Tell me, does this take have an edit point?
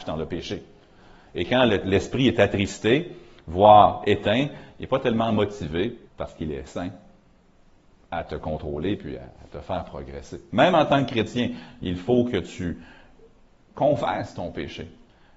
yes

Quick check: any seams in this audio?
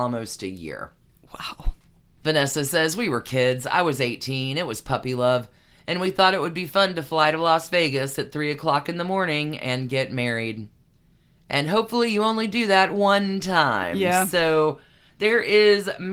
no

